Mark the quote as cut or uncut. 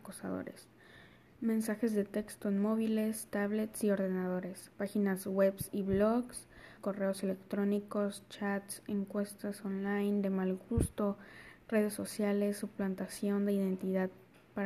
cut